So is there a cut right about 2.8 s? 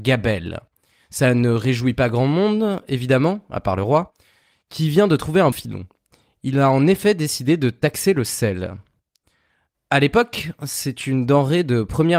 no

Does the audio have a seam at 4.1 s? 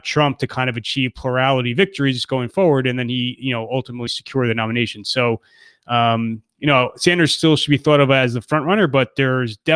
yes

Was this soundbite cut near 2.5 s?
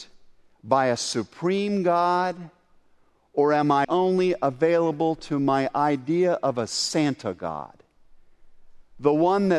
no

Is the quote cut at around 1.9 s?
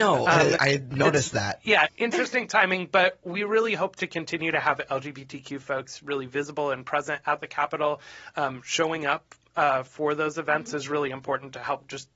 yes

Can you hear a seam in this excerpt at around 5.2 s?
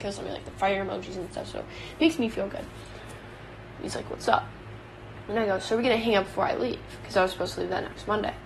no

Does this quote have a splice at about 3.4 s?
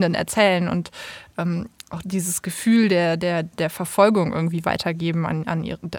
no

